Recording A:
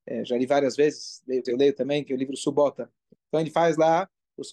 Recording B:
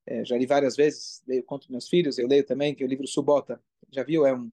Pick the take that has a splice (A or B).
A